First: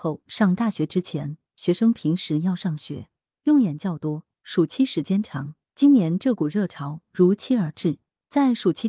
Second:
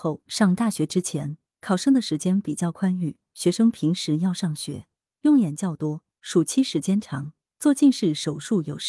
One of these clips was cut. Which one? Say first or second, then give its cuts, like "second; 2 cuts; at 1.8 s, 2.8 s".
first; 2 cuts; at 1.5 s, 5.7 s